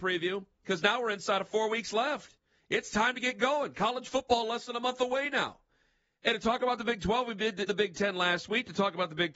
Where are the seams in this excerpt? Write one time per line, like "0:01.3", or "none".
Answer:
0:07.7